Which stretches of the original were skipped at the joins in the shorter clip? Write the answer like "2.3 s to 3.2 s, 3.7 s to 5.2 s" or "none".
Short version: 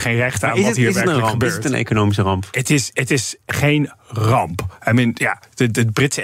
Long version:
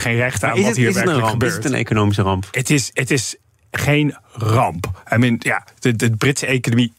3.4 s to 3.7 s

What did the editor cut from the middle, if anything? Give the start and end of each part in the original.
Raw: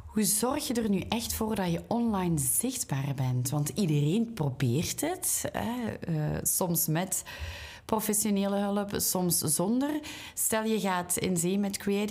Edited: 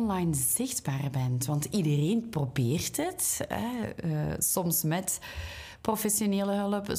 none

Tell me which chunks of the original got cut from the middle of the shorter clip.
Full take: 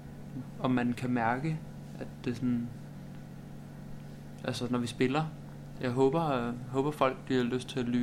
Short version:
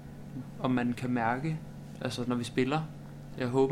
1.9 s to 4.4 s

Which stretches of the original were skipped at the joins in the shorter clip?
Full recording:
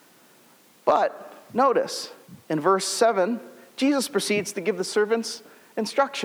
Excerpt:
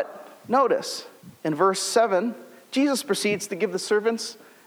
none

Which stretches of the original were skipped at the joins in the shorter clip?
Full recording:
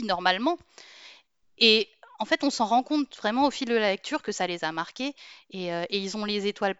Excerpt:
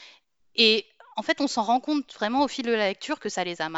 none

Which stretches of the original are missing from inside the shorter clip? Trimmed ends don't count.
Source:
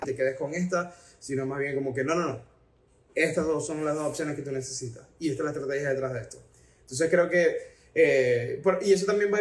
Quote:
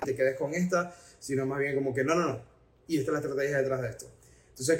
2.9 s to 5.2 s

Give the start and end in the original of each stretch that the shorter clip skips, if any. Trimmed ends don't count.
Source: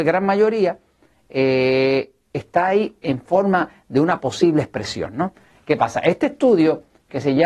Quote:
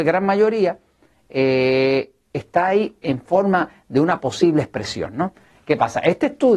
none

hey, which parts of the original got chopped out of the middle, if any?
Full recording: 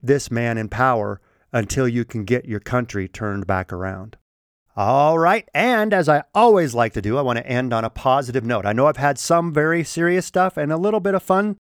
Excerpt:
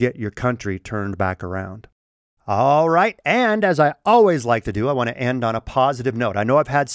none

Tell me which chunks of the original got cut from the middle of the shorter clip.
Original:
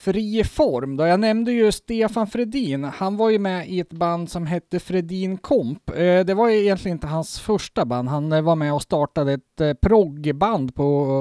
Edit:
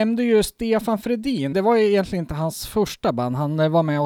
2.8 s to 6.2 s

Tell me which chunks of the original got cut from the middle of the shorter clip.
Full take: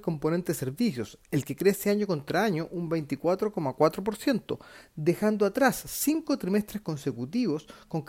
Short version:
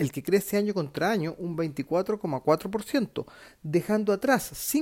none

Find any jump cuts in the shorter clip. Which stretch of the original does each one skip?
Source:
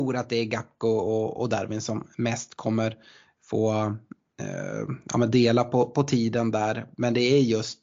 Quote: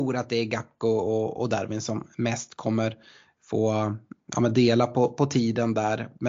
4.3 s to 5.1 s

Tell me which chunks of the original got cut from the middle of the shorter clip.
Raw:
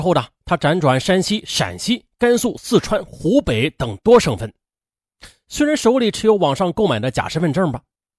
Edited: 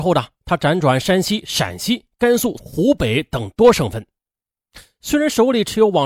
2.6 s to 3.1 s

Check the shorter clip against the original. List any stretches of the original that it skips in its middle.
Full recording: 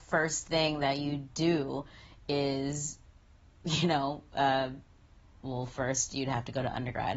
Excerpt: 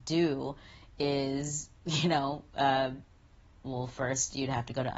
3.0 s to 3.5 s

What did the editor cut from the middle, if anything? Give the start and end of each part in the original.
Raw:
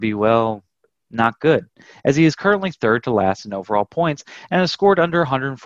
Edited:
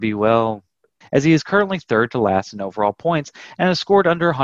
1.0 s to 1.9 s

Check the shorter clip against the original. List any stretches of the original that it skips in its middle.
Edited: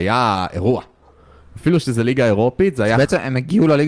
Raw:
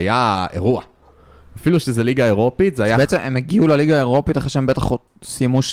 none

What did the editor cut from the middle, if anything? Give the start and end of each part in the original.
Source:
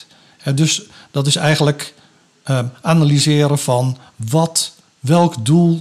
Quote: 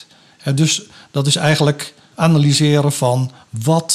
2.1 s to 2.8 s

